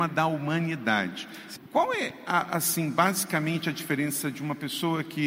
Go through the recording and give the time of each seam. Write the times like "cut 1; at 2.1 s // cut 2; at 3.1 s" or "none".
cut 1; at 1.6 s